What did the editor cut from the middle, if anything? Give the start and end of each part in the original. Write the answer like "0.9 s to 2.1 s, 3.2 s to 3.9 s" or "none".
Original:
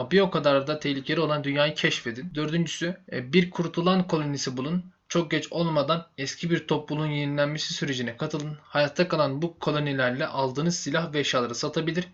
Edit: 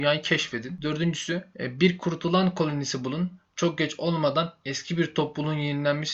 none